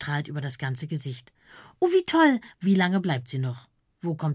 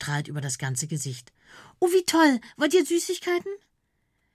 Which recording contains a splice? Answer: first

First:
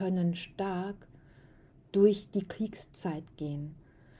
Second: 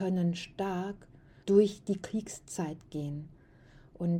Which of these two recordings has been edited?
second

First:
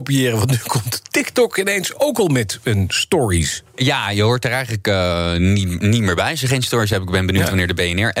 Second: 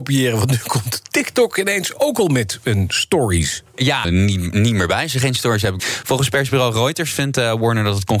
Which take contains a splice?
second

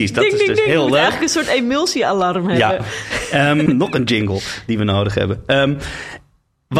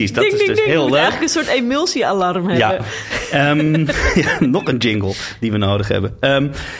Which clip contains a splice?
first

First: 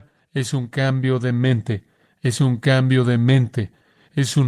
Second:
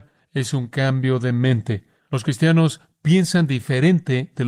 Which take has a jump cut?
second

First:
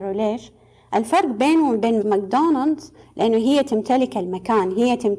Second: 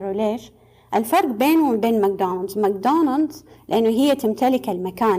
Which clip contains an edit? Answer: first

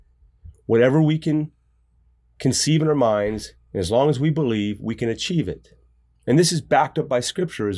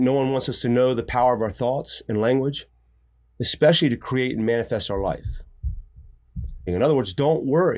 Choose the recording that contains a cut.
second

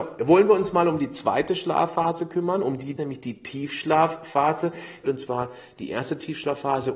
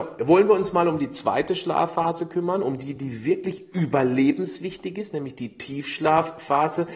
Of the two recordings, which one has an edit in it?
first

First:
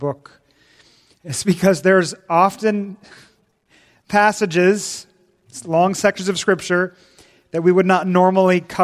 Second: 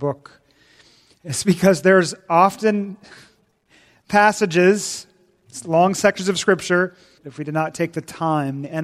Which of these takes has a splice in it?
second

